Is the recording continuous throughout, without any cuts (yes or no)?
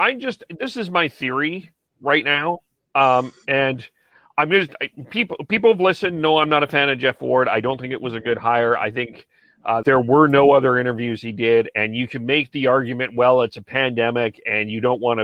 no